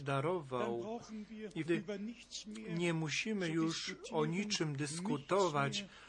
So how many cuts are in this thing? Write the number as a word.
one